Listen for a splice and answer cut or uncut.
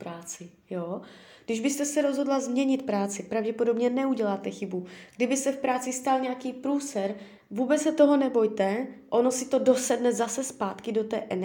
uncut